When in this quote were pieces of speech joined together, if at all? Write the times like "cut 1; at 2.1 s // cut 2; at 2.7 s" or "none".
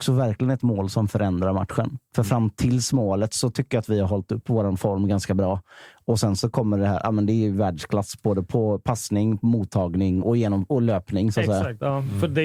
cut 1; at 10.2 s